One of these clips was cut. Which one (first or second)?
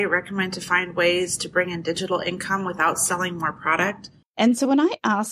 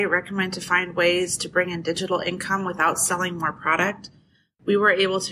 first